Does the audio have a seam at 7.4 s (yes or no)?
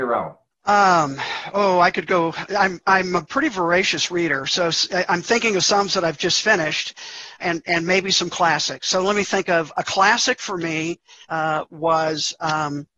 yes